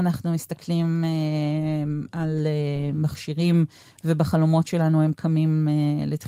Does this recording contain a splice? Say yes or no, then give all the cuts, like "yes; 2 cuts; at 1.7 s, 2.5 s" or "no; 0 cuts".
no; 0 cuts